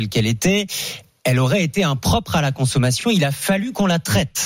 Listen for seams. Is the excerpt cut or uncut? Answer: uncut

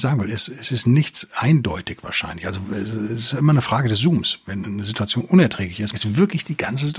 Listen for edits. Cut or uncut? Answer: cut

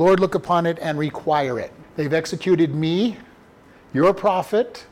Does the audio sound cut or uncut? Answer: cut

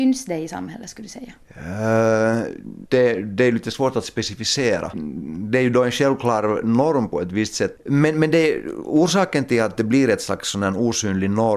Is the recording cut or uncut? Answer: cut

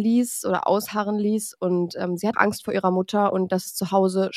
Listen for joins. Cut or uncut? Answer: cut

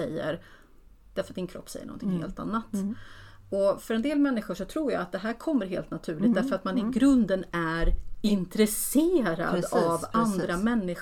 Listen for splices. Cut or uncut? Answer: uncut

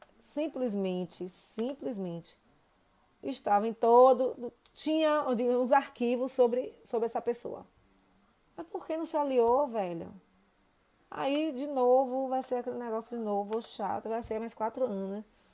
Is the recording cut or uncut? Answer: cut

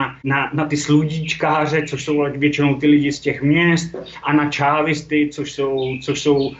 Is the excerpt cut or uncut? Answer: uncut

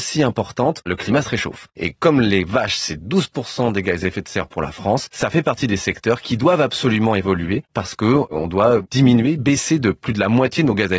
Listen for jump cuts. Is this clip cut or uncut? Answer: uncut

